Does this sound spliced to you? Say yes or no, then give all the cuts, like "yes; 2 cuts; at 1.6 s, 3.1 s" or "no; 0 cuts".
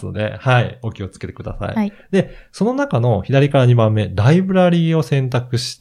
no; 0 cuts